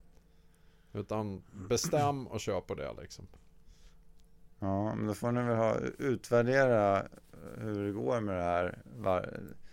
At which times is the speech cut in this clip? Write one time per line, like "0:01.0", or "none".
0:04.5

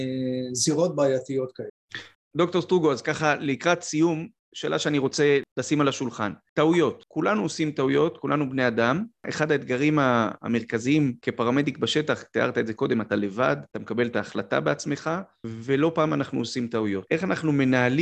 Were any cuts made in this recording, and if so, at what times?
none

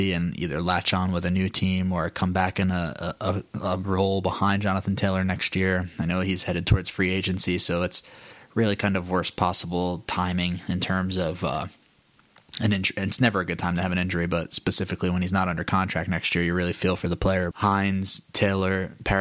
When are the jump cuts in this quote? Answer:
0:17.5

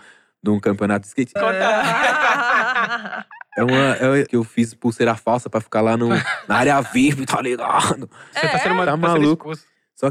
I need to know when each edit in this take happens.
0:01.4
0:04.3
0:08.3

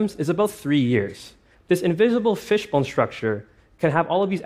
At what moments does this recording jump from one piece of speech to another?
0:01.5

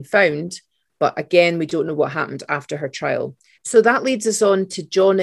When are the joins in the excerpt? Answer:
0:03.5

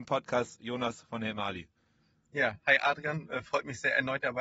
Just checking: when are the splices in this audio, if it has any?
none

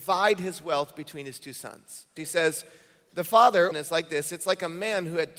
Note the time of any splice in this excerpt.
0:02.2
0:03.7

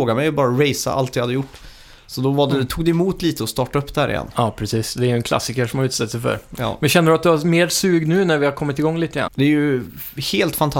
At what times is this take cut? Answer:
0:09.3

